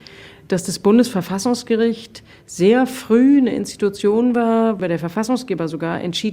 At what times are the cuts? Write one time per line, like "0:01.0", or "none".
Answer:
0:04.8